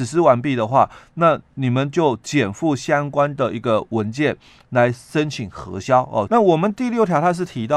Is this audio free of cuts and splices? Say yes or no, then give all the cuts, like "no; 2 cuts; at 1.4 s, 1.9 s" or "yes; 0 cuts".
no; 1 cut; at 6.3 s